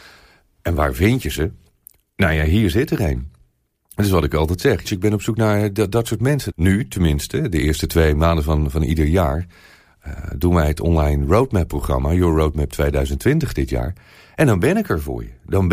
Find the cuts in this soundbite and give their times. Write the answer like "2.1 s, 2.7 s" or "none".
4.8 s, 6.5 s